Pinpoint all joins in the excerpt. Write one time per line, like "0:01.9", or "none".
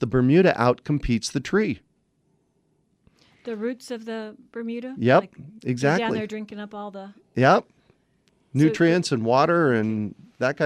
none